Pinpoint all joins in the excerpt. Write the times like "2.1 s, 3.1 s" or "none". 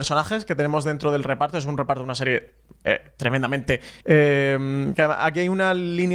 4.0 s